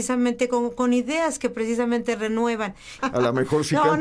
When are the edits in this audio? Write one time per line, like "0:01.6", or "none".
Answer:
0:03.0